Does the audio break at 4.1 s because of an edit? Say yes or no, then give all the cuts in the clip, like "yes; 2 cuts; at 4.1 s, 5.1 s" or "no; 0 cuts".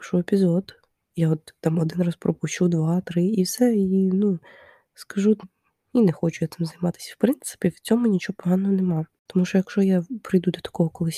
no; 1 cut; at 5.4 s